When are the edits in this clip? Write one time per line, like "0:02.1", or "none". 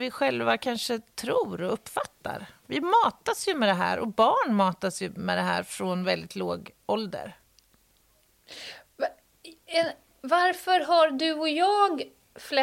none